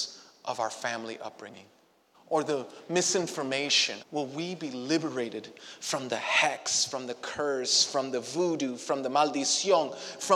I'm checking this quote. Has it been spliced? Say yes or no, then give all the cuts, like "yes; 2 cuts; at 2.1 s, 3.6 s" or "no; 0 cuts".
yes; 2 cuts; at 2.1 s, 4.0 s